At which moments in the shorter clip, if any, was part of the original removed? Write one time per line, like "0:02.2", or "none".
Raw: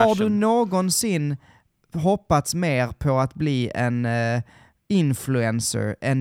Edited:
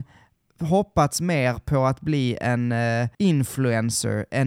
0:03.1

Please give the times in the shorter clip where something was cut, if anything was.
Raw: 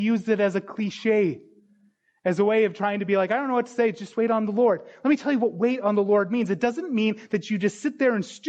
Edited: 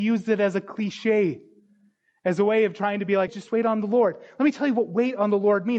0:03.3

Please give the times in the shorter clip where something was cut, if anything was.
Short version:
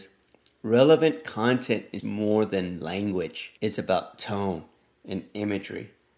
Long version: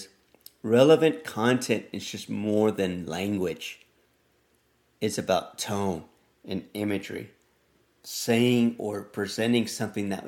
0:02.0
0:03.6

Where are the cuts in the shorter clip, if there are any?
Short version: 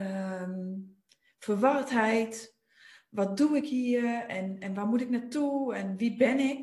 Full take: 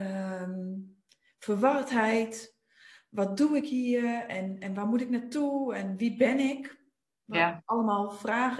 none

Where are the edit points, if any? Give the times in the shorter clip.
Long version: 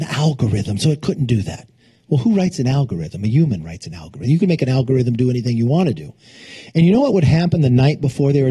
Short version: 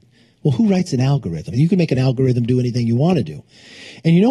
0:01.5

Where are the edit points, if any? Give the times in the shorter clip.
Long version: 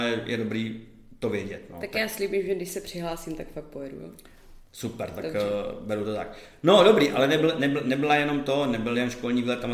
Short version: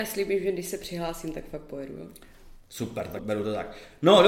0:03.2

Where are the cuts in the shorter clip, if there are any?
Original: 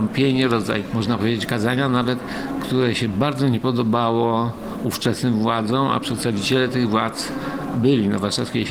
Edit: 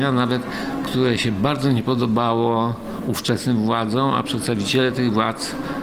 none

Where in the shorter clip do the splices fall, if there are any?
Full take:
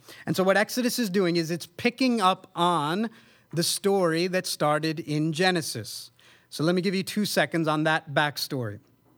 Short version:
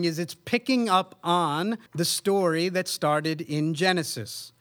0:01.9

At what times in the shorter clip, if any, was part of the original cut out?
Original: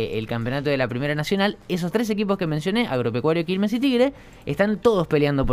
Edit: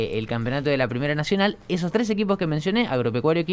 none

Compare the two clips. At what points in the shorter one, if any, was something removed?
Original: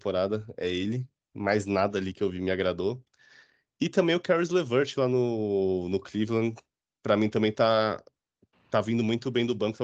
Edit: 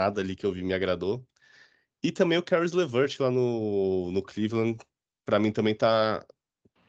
none

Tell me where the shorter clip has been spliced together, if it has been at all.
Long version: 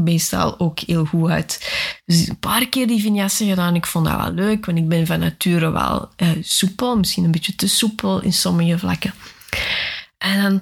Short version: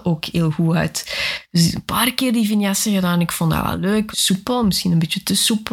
0:04.1

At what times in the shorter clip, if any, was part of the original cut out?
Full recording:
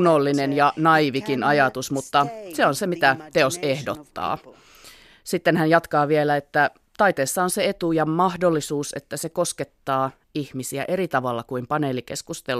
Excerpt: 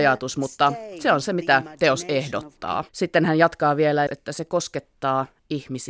0:02.9
0:04.1

